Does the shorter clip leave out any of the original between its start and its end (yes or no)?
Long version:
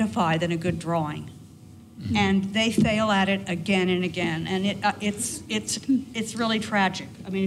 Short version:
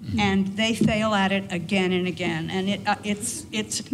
no